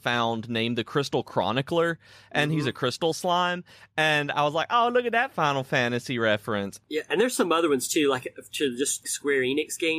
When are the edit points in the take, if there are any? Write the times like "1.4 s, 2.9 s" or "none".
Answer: 6.8 s, 9.0 s

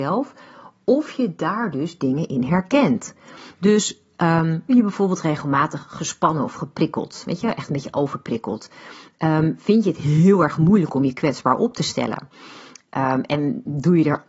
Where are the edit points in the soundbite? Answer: 4.7 s

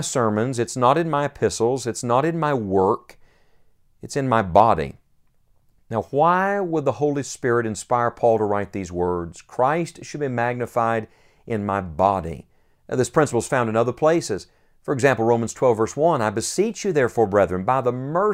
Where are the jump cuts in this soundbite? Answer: none

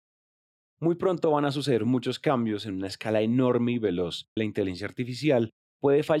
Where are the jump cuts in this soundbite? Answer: 4.4 s

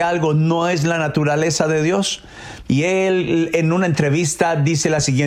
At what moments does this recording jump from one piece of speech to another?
2.6 s

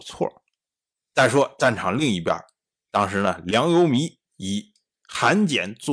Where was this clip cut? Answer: 4.3 s

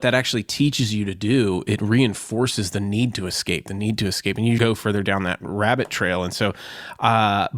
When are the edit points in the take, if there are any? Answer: 4.6 s

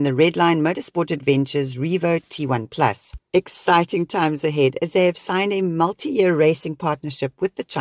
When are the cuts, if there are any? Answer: 3.3 s

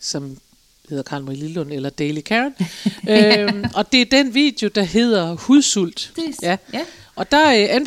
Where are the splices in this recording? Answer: 6.2 s

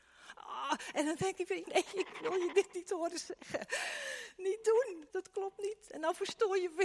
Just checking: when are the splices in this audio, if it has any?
1.6 s, 5.1 s

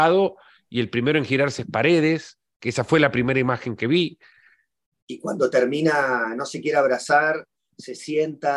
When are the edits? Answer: 4.9 s

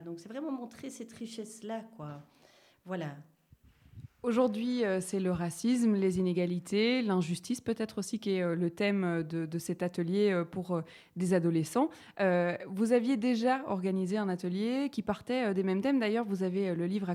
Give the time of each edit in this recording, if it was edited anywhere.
none

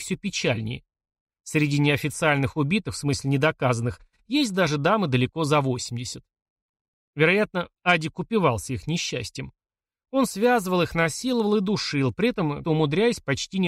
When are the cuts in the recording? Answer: 12.6 s

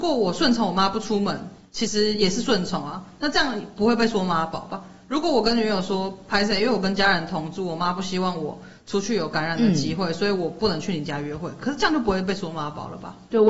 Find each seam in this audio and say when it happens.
none

